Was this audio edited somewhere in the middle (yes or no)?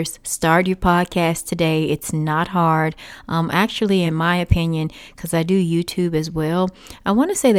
no